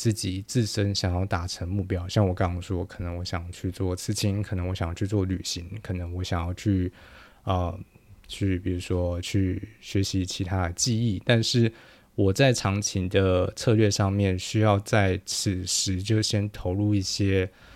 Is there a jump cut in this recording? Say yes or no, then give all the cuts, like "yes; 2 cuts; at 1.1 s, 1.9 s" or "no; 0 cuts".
no; 0 cuts